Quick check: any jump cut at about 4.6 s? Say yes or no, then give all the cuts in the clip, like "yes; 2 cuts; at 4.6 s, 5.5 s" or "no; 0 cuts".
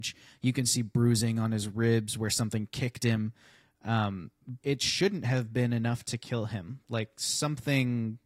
yes; 1 cut; at 4.6 s